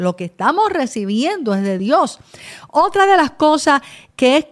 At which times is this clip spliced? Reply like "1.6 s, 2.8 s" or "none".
none

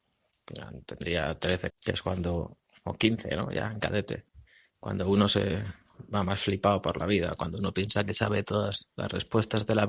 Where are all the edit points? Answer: 1.7 s

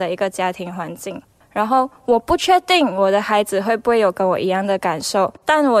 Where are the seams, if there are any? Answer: 1.4 s

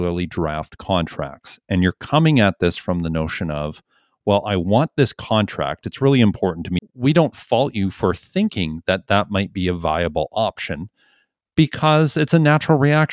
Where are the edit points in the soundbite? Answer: 6.8 s

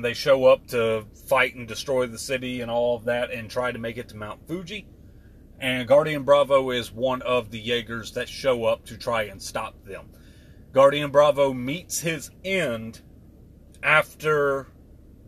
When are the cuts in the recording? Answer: none

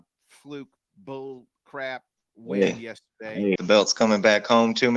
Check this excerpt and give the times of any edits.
3.6 s

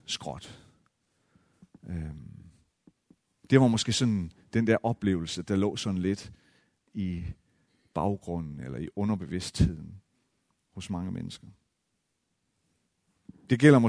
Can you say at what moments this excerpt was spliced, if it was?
none

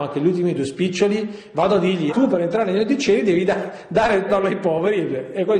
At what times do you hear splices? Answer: 2.1 s, 4.3 s

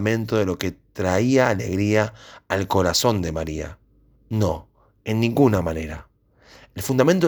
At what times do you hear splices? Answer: 4.1 s

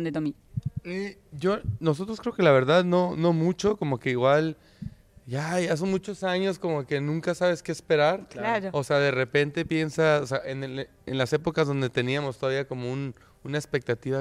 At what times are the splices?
none

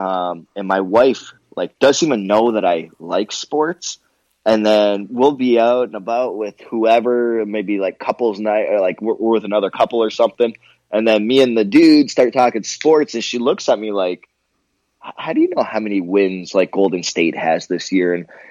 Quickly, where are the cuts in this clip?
none

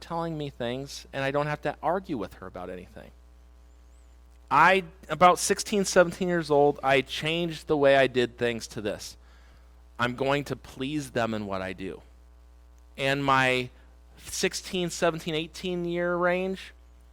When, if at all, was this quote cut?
none

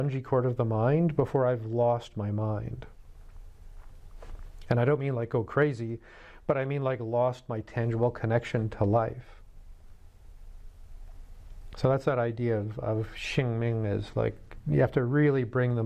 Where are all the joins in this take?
none

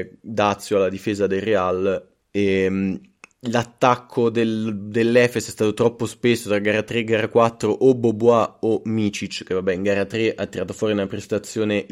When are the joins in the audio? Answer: 2.2 s

